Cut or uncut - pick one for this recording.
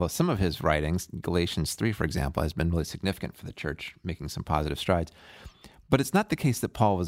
uncut